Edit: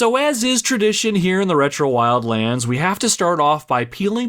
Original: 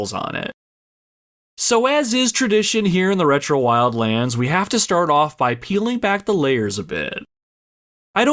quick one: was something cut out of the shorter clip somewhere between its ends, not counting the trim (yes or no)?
no